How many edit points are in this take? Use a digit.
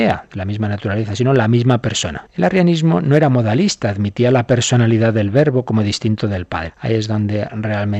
2